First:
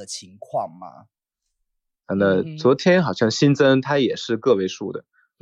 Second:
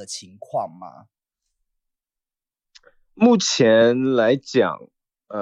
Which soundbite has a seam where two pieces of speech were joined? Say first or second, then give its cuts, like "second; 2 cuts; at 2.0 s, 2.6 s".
first; 1 cut; at 2.0 s